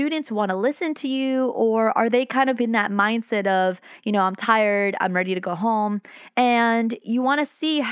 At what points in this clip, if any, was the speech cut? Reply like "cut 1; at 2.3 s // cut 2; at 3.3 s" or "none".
none